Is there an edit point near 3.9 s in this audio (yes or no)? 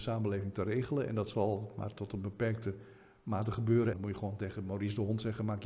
yes